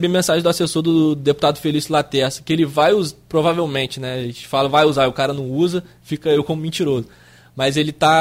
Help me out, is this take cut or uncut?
uncut